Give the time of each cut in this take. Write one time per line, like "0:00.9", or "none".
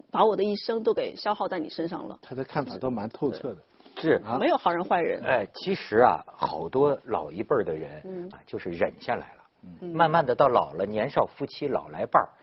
0:08.3